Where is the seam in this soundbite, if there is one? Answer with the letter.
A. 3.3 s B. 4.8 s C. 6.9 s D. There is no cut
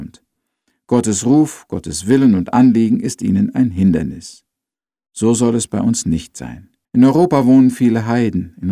C